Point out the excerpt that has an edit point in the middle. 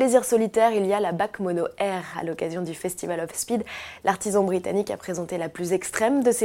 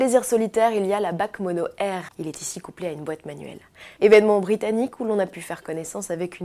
second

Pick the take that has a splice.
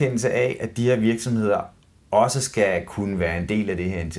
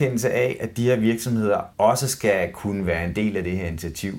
second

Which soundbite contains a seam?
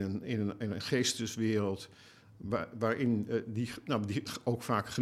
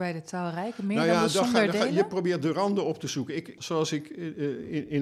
second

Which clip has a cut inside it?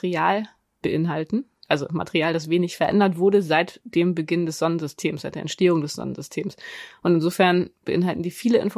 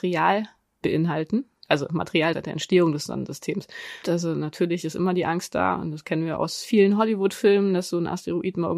second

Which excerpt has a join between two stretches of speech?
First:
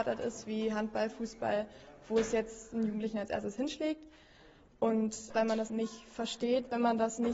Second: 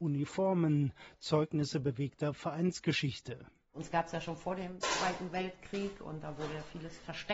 first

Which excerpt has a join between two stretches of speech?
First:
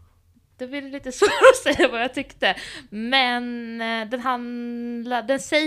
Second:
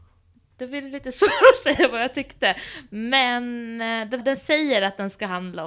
second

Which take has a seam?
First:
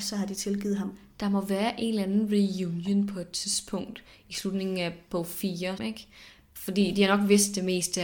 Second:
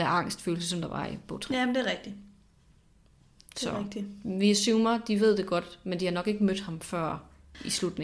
first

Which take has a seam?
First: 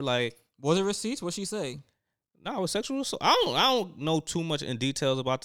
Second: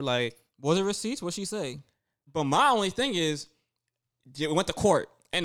second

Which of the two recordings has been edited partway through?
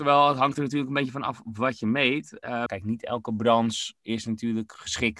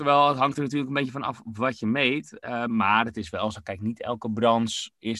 first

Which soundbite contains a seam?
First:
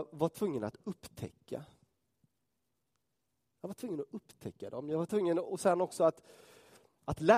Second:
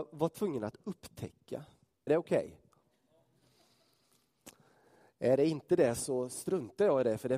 second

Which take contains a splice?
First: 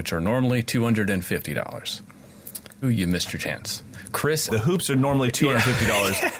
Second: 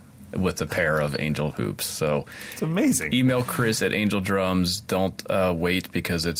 first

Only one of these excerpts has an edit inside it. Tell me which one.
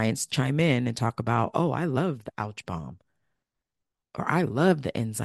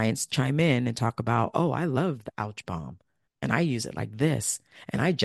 second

